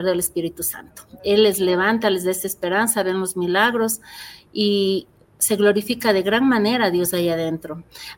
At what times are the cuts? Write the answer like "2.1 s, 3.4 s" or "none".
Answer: none